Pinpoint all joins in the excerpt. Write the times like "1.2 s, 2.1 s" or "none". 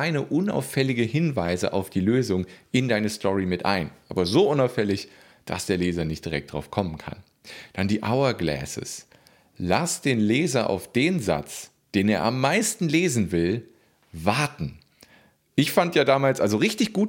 none

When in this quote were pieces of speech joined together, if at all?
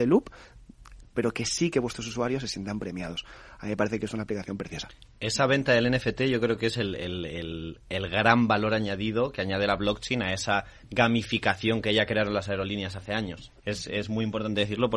1.1 s, 13.6 s

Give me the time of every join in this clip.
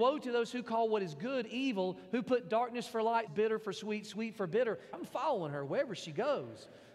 3.3 s, 4.9 s

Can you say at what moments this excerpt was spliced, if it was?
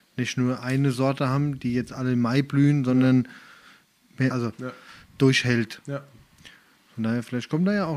4.3 s

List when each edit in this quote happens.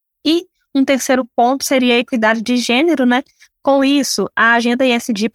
3.5 s

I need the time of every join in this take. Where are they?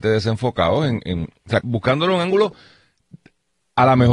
1.6 s

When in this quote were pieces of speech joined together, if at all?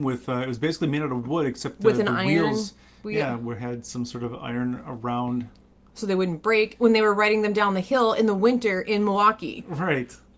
none

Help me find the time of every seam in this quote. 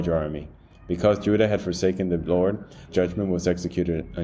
2.9 s

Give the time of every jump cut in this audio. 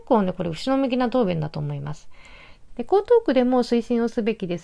2.7 s

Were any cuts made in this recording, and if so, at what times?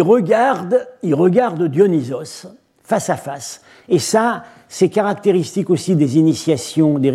none

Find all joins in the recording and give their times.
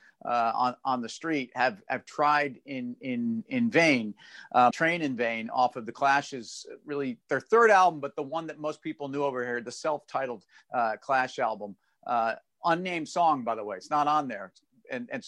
4.7 s, 7.2 s

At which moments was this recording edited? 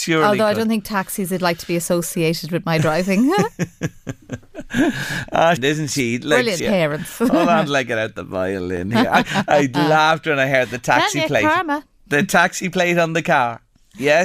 5.6 s, 6.6 s

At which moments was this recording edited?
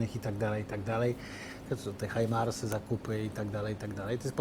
1.7 s

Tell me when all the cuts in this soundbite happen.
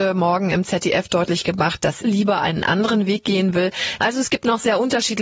2.0 s, 4.0 s

